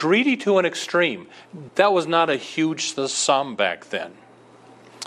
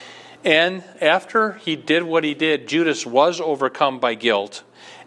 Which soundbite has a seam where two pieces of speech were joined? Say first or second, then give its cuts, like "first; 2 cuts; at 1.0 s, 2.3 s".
first; 1 cut; at 1.7 s